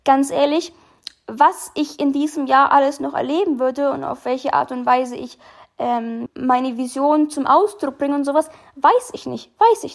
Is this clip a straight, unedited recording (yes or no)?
no